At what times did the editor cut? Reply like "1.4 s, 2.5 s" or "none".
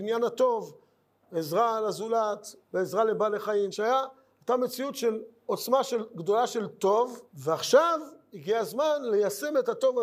2.6 s, 3.7 s, 7.3 s

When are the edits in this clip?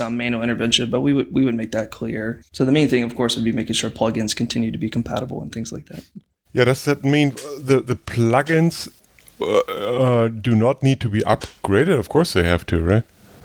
2.4 s

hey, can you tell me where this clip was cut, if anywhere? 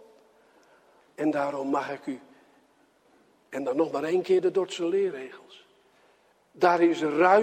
1.0 s, 6.3 s

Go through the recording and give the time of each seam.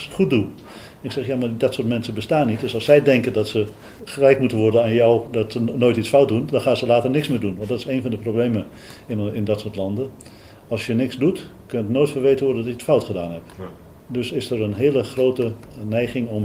none

